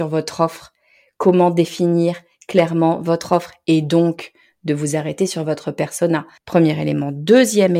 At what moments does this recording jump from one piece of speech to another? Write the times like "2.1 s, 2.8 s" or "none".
6.4 s